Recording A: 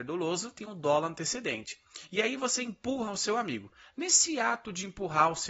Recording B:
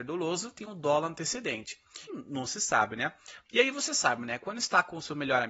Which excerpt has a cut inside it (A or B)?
B